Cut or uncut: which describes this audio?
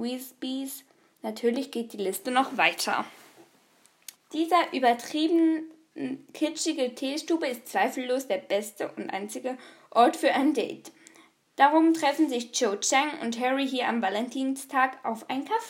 cut